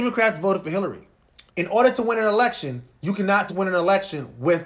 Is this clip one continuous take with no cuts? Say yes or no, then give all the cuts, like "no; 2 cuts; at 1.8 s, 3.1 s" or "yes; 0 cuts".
no; 2 cuts; at 1.5 s, 3.5 s